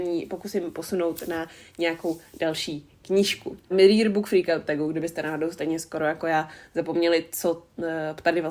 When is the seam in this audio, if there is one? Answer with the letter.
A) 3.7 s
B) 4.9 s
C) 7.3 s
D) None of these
A